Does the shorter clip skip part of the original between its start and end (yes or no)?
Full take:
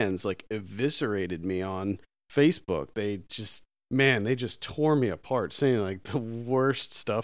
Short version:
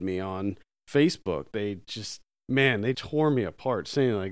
yes